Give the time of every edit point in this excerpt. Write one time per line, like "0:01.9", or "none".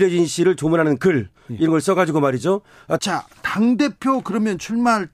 0:03.0